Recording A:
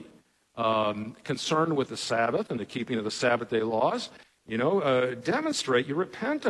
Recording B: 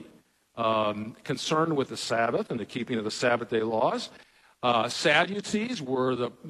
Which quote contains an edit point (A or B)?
A